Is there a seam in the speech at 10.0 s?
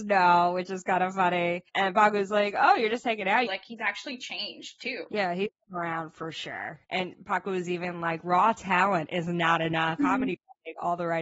yes; 2 cuts; at 3.5 s, 10.0 s

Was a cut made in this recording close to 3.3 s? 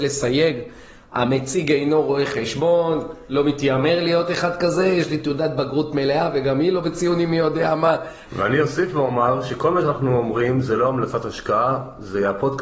no; 1 cut; at 8.3 s

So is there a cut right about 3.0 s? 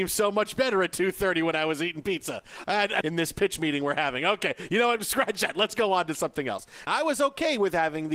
yes; 2 cuts; at 3.0 s, 6.9 s

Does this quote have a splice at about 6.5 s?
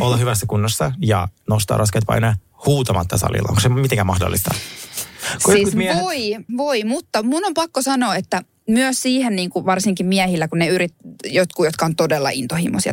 yes; 1 cut; at 6.5 s

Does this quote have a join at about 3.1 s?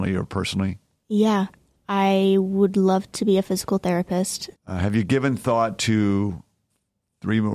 no; 2 cuts; at 1.7 s, 4.5 s

